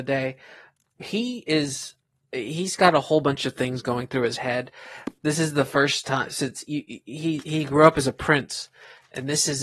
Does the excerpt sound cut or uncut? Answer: uncut